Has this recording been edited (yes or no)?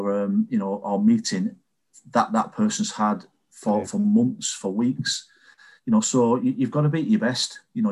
no